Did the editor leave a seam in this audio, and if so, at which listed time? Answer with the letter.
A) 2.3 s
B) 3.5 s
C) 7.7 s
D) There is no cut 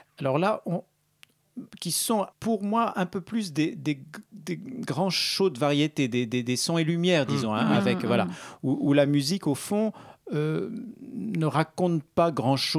A